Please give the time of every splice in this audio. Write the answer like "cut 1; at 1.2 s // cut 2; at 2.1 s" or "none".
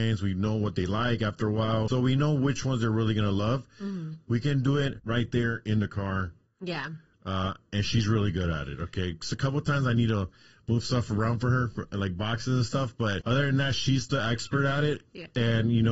cut 1; at 4.3 s